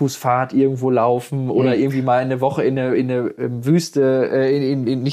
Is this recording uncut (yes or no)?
yes